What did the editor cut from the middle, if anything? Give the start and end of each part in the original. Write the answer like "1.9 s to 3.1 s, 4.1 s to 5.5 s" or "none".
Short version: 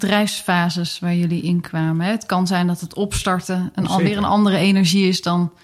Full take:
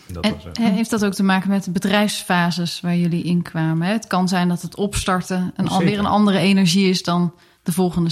none